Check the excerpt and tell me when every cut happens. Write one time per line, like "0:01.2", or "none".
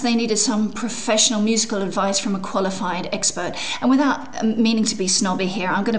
none

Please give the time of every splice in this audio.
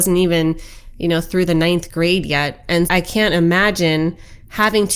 0:02.9

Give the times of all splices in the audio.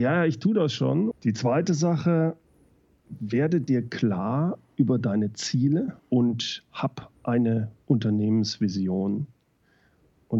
0:01.1
0:03.0
0:06.0

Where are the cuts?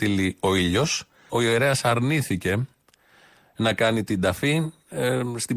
0:01.3

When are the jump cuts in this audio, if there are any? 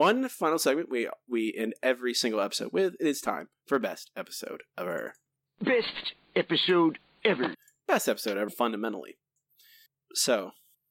0:08.5

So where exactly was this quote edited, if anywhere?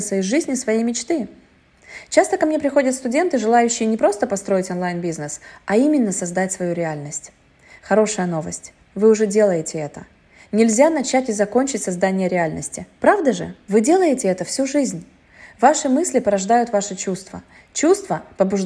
none

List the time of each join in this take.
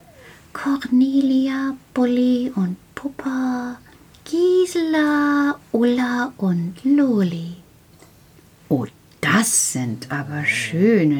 none

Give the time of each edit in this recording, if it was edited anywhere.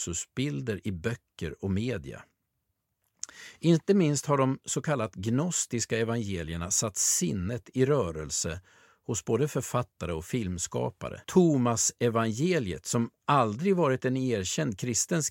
0:11.2

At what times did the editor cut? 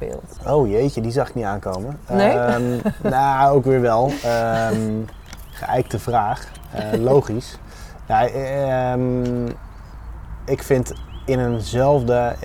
none

